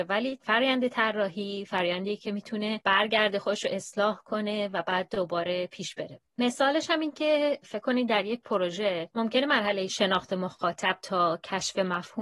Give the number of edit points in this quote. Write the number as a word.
one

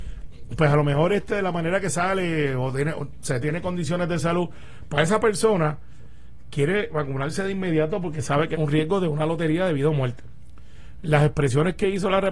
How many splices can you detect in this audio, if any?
two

